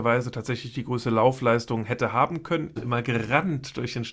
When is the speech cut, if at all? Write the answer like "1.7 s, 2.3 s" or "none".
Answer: 2.8 s